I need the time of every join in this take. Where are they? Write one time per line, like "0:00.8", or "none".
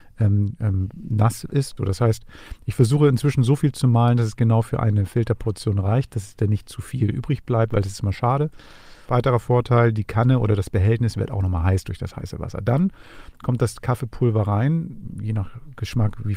0:01.8
0:09.1